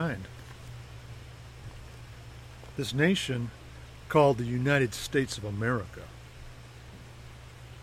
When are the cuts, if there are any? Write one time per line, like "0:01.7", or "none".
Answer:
0:02.7

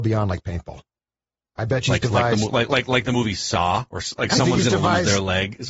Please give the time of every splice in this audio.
none

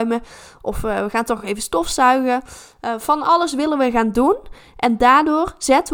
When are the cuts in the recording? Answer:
none

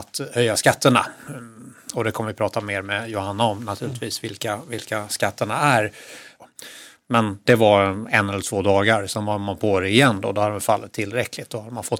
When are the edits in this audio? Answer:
0:06.3

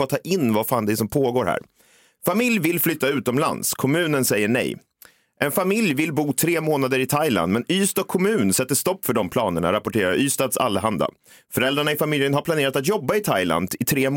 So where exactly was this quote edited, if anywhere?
none

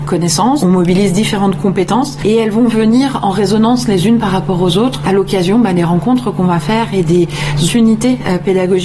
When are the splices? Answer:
0:07.7

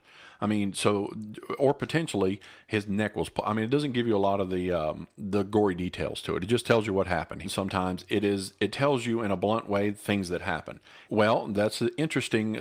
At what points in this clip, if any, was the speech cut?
0:07.4
0:11.1

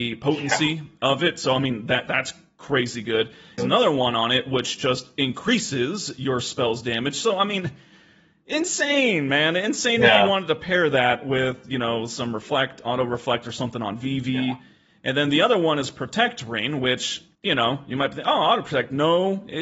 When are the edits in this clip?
0:03.6

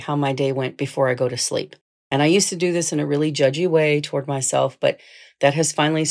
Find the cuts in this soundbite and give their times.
none

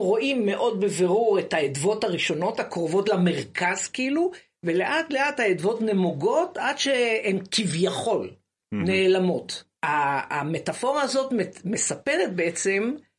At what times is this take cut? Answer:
0:09.7

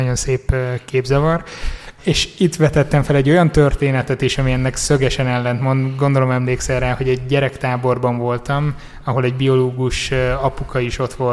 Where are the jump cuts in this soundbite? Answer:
0:02.0

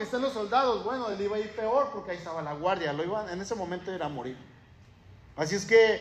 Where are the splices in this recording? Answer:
none

